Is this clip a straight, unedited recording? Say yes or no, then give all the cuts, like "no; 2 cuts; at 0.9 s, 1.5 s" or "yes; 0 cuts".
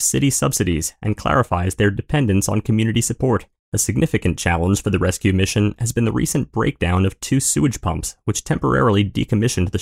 no; 1 cut; at 3.6 s